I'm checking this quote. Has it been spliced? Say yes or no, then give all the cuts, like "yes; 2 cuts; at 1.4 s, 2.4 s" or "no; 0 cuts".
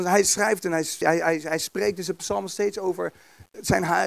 yes; 1 cut; at 1.0 s